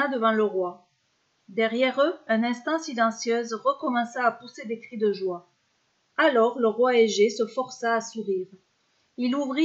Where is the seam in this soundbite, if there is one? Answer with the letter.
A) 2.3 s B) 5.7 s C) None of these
A